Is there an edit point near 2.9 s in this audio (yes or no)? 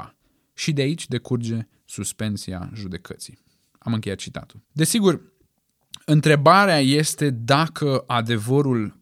no